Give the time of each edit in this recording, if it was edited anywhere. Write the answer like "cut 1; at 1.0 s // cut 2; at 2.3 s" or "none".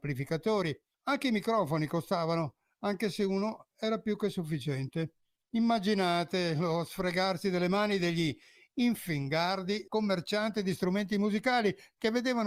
cut 1; at 0.9 s // cut 2; at 9.9 s